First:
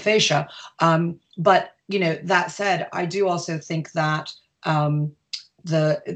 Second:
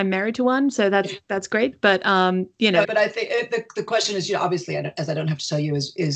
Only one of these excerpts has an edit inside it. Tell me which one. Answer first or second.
second